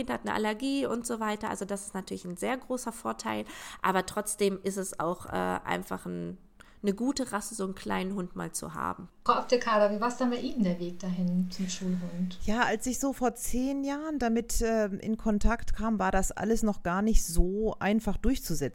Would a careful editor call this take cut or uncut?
uncut